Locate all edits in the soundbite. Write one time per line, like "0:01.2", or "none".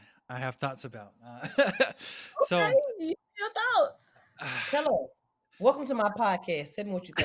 none